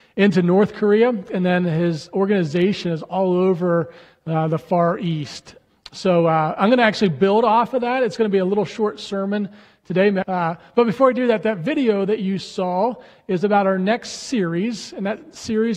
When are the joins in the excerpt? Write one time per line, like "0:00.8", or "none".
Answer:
0:10.2